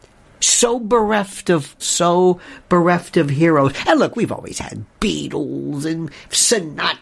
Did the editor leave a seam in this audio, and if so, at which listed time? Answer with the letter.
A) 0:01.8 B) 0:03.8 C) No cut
A